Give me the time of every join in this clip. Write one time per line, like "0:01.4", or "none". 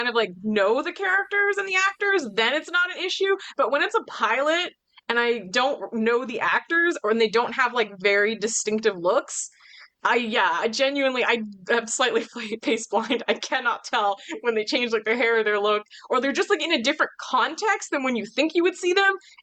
none